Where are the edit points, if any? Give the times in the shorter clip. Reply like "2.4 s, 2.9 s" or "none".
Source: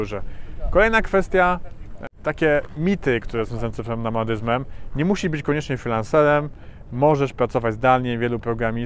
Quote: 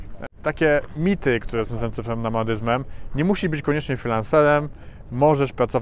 none